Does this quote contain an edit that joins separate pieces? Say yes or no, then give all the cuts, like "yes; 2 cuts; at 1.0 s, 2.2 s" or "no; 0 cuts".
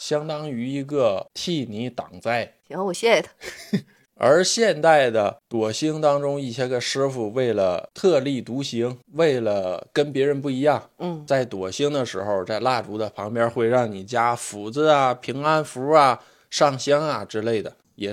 no; 0 cuts